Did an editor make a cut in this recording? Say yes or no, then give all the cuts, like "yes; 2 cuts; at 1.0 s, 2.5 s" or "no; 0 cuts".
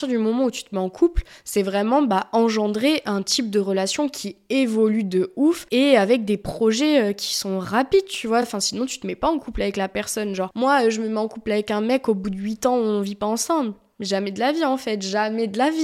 no; 0 cuts